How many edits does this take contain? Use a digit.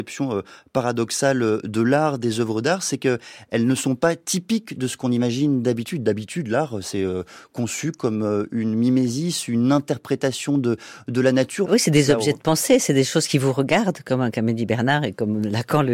1